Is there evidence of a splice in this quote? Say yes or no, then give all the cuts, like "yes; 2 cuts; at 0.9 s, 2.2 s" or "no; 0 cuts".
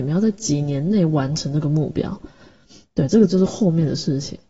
no; 0 cuts